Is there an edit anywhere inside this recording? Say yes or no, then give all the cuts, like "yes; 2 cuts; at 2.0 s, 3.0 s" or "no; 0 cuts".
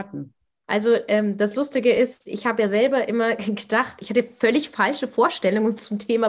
no; 0 cuts